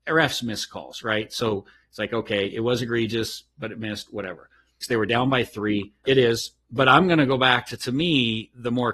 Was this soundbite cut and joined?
yes; 2 cuts; at 4.8 s, 6.0 s

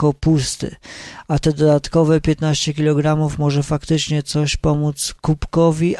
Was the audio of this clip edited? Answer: no; 0 cuts

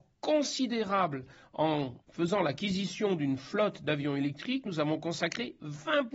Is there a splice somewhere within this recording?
yes; 2 cuts; at 2.0 s, 4.7 s

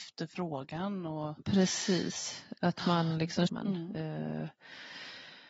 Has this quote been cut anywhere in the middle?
yes; 1 cut; at 3.5 s

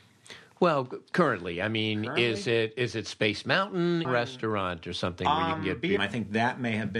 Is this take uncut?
no; 2 cuts; at 4.0 s, 6.0 s

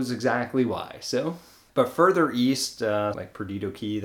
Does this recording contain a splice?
yes; 2 cuts; at 1.7 s, 3.1 s

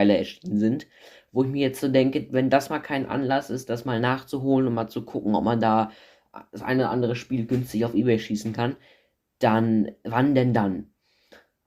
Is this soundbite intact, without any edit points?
yes; 0 cuts

